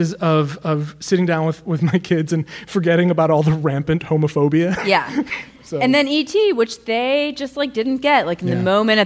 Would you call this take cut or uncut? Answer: uncut